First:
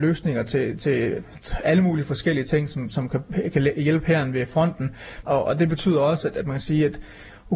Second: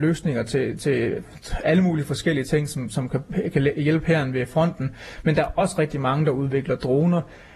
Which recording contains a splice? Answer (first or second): first